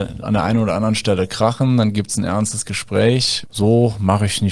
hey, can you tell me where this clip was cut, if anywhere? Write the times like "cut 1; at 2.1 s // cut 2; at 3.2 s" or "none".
cut 1; at 3.4 s